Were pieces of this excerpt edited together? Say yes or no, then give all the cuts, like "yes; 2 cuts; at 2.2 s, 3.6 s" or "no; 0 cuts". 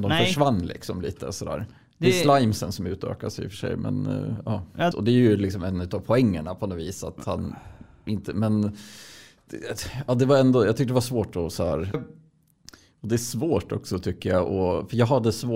yes; 2 cuts; at 4.9 s, 11.9 s